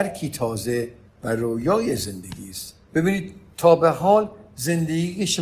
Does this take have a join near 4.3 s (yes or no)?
no